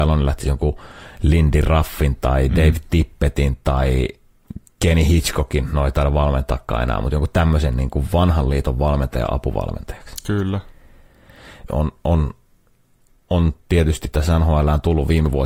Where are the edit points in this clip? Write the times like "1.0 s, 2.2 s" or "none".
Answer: 11.7 s